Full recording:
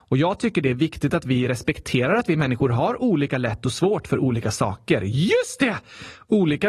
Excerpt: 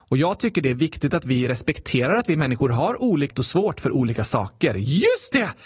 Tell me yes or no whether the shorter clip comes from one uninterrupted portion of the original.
no